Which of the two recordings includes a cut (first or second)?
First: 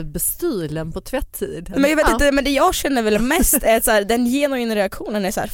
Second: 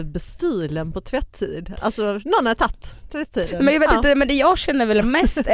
first